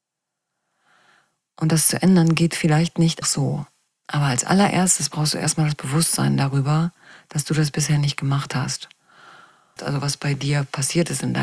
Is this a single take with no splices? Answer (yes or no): no